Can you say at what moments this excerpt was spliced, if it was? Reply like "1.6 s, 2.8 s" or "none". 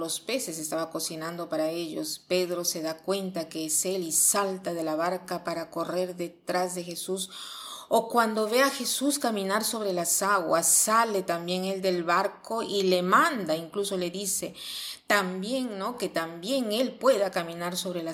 none